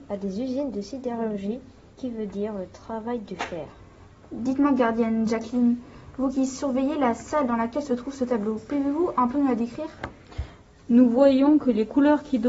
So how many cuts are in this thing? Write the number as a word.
zero